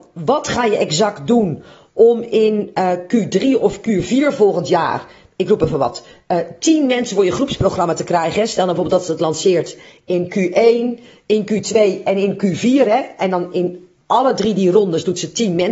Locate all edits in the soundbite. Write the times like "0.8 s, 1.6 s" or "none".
none